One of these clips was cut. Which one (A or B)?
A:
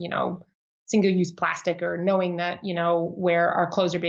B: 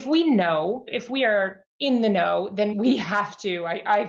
B